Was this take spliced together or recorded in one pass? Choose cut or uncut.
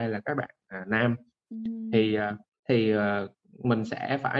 cut